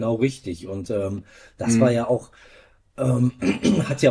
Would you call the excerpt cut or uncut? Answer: uncut